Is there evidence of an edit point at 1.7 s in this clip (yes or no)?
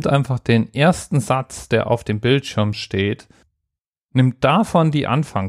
no